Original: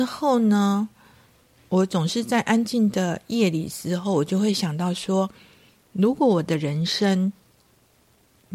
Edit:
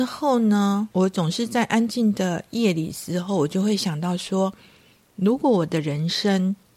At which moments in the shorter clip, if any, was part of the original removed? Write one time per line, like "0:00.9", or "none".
0:00.9